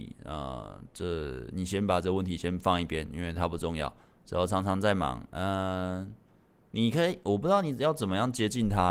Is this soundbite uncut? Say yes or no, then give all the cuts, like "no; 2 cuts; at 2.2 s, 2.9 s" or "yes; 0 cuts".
yes; 0 cuts